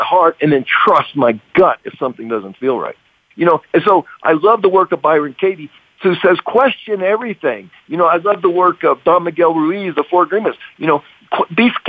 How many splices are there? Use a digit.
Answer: 1